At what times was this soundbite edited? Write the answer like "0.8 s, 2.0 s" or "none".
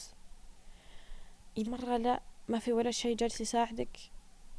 1.7 s